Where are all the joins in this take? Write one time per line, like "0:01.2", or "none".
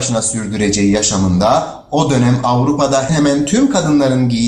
0:03.1